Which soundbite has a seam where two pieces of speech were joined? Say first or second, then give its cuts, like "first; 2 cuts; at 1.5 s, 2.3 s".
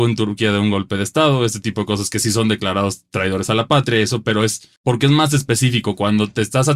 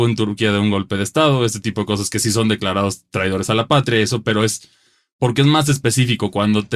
first; 1 cut; at 4.8 s